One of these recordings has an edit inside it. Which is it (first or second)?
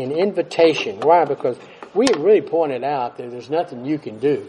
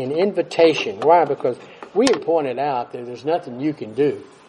second